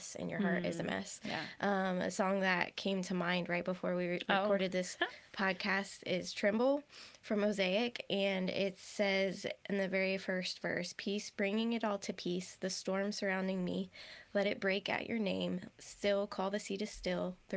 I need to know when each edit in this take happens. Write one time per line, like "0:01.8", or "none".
none

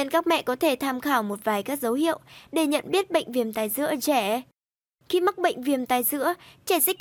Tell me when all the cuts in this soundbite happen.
none

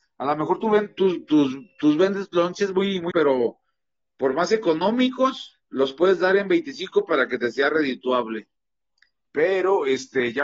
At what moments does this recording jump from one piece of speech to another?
0:03.1
0:05.6
0:09.2

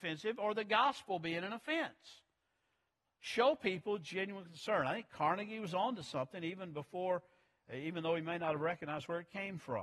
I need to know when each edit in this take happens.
none

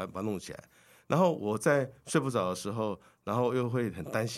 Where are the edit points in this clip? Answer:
none

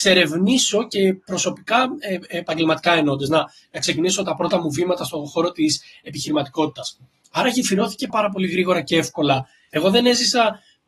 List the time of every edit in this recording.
0:08.1
0:09.7

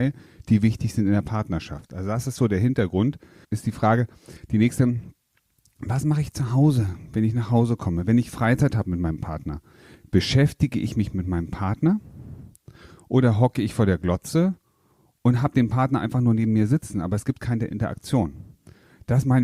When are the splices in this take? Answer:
0:03.4

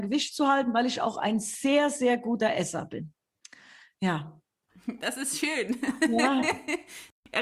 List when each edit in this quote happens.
none

